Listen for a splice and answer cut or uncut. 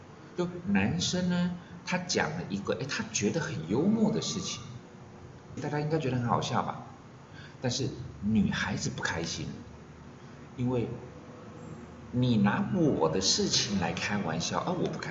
cut